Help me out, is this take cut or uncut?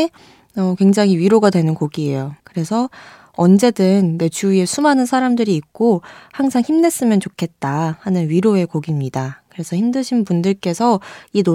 cut